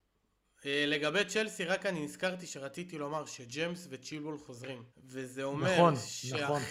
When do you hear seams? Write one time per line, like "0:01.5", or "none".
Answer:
0:04.9